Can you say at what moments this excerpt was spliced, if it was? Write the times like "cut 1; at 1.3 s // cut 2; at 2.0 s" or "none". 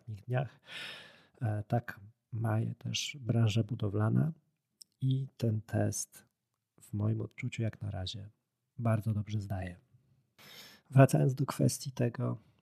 none